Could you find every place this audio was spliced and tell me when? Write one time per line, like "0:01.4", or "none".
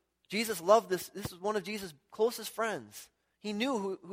none